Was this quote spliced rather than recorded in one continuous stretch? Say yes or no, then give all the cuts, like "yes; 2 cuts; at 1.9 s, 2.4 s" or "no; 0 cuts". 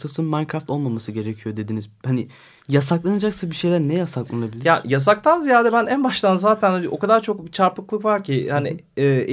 no; 0 cuts